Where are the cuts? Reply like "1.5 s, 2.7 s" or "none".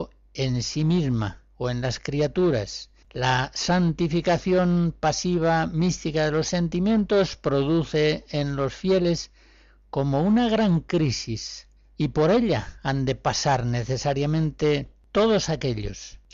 3.0 s